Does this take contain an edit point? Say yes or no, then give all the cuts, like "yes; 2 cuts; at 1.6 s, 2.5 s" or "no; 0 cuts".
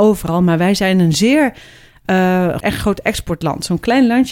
yes; 1 cut; at 2.6 s